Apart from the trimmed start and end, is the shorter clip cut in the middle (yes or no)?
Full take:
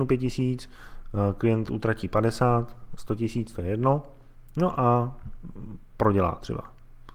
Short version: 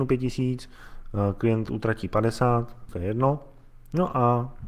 yes